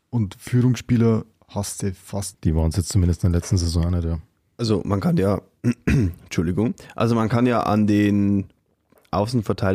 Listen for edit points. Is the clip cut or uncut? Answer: cut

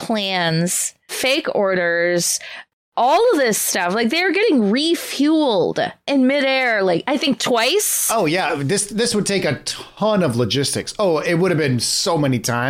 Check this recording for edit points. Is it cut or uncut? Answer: uncut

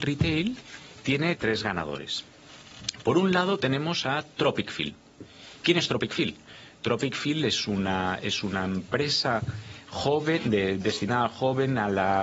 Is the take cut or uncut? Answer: cut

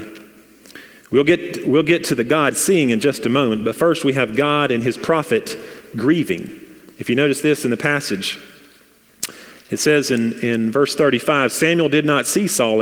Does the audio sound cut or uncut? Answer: uncut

